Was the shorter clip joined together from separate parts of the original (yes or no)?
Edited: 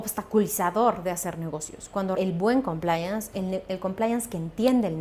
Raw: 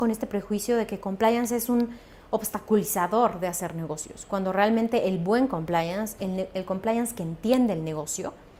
yes